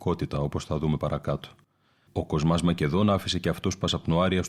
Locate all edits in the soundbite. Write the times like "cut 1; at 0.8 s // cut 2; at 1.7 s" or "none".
cut 1; at 2.1 s